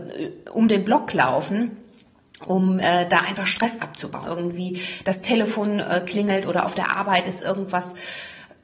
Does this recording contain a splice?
yes; 1 cut; at 4.2 s

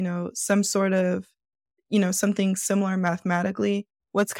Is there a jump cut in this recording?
yes; 1 cut; at 1.8 s

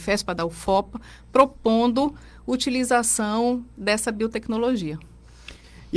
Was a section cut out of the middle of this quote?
no; 0 cuts

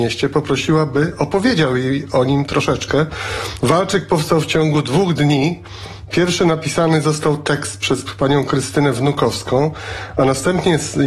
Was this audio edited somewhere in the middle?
yes; 1 cut; at 3.6 s

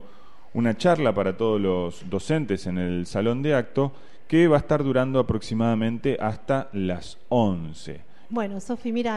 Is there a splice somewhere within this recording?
yes; 1 cut; at 8.3 s

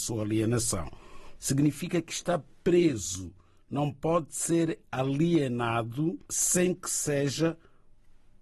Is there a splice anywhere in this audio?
yes; 2 cuts; at 1.4 s, 6.2 s

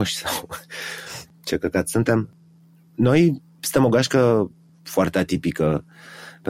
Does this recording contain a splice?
no; 0 cuts

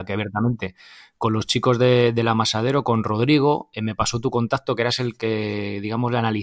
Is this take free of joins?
yes; 0 cuts

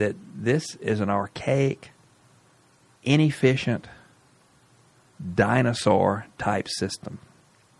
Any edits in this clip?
no; 0 cuts

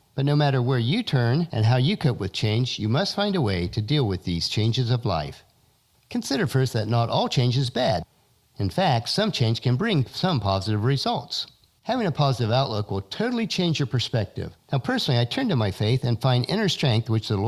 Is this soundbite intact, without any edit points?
no; 2 cuts; at 11.8 s, 14.6 s

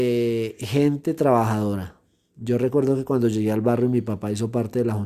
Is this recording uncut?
yes; 0 cuts

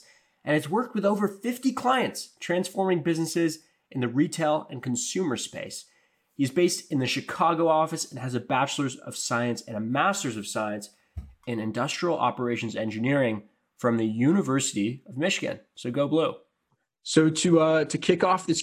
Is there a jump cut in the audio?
no; 0 cuts

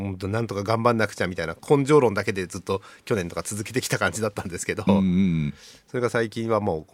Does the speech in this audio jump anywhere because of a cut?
no; 0 cuts

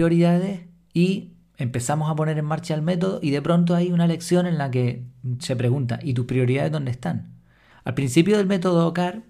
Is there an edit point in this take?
yes; 2 cuts; at 5.4 s, 7.7 s

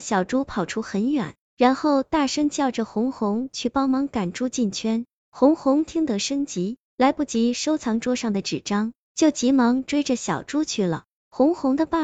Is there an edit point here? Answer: no; 0 cuts

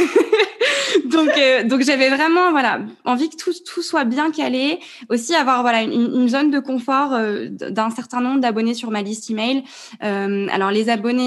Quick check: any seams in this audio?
no; 0 cuts

